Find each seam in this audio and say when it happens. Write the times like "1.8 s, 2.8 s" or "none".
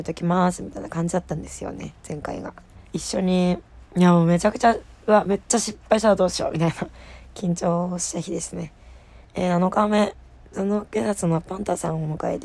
2.9 s, 9.2 s